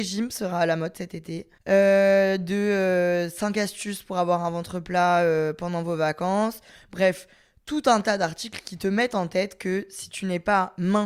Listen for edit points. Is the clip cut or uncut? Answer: uncut